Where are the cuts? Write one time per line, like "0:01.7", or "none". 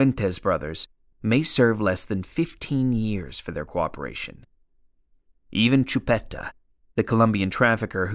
0:01.1

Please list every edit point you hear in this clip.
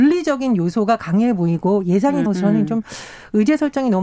0:02.3

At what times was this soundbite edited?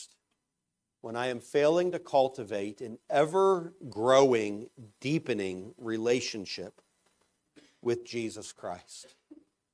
0:00.9

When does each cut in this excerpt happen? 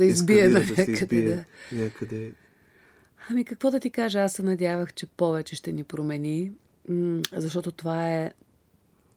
none

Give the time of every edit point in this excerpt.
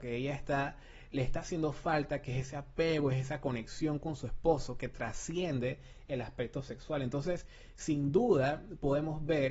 none

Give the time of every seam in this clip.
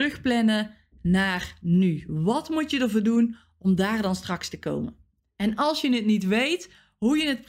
none

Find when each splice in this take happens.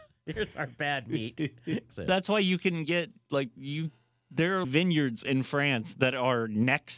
0:01.9
0:04.6

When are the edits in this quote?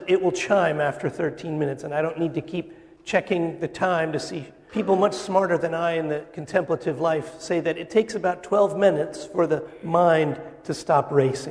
0:04.7

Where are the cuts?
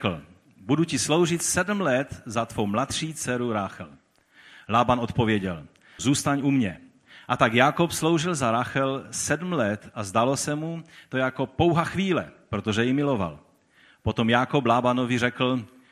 0:06.0

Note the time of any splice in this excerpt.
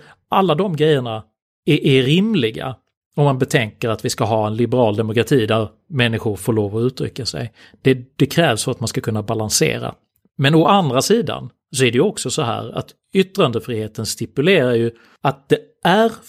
none

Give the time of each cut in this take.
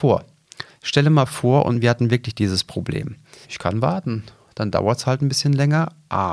0:03.4

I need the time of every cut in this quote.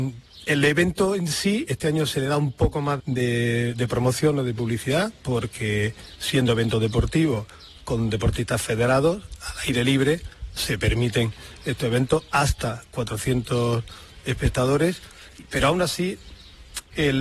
0:03.0
0:10.6

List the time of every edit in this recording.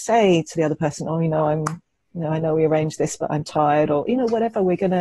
none

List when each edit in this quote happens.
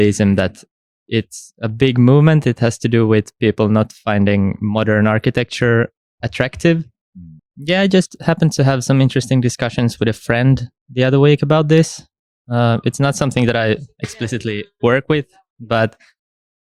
0:07.4

